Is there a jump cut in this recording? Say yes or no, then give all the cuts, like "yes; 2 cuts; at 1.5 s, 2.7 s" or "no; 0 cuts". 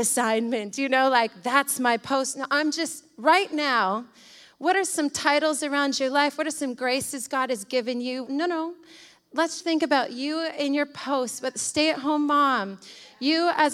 yes; 2 cuts; at 8.3 s, 9.6 s